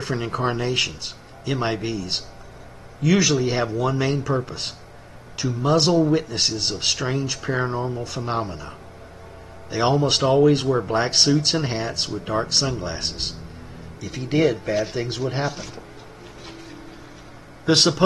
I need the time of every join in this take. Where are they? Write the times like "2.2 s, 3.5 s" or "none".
1.3 s, 14.0 s

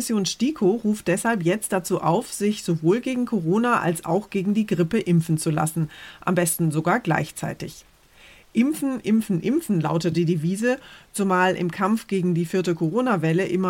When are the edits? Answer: 10.1 s

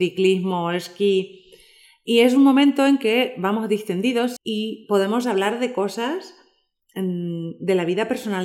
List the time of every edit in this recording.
4.4 s

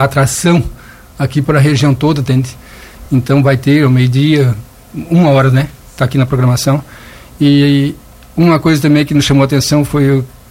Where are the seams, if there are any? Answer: none

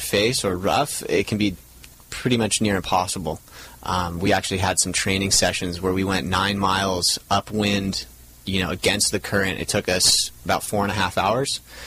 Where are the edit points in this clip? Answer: none

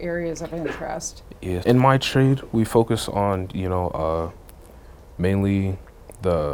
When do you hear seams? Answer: 1.6 s

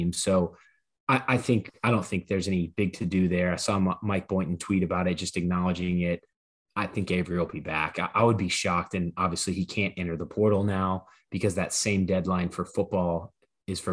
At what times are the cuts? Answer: none

